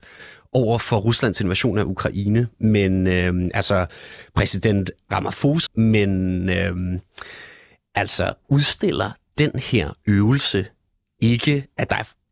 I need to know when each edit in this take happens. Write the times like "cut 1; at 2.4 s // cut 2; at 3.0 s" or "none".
cut 1; at 5.7 s